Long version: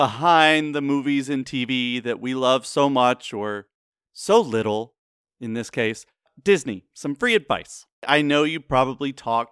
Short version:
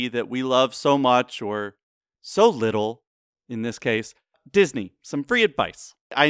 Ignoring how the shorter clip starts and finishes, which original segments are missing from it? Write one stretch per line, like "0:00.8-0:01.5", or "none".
none